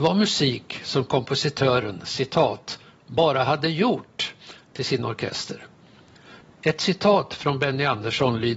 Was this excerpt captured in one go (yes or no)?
no